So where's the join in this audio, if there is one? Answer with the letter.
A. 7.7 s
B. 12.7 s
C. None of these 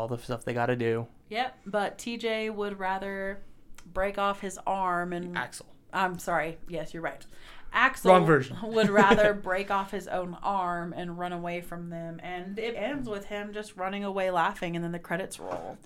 B